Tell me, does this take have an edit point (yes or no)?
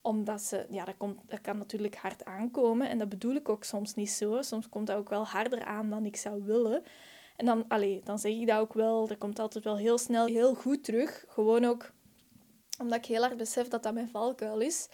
yes